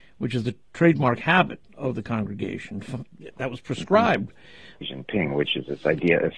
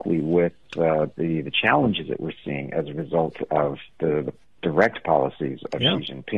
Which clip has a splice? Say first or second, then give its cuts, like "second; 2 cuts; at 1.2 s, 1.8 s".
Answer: first; 1 cut; at 4.8 s